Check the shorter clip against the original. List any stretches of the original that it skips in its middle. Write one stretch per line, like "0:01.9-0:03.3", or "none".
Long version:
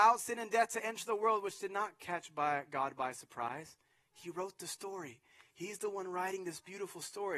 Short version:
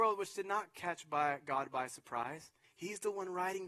0:03.9-0:05.4